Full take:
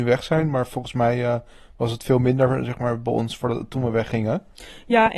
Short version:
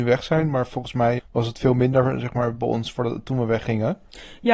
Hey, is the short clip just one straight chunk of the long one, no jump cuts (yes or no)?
no